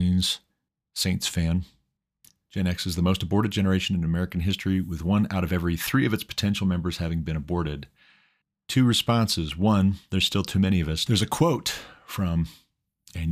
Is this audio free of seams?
no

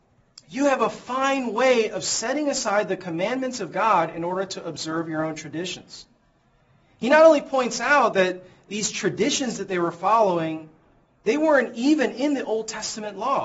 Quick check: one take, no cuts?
yes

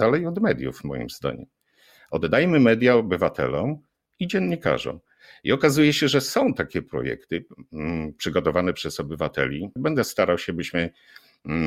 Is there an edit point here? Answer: yes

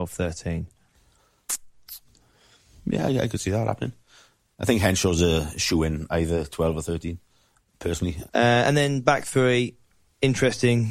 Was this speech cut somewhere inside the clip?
yes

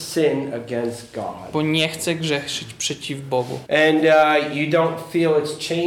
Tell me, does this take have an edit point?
yes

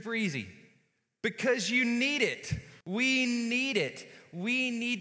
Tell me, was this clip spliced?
yes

